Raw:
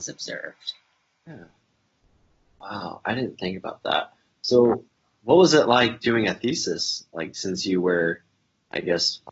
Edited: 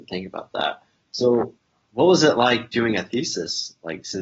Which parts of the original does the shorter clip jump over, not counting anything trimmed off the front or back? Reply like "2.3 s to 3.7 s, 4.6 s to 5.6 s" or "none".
none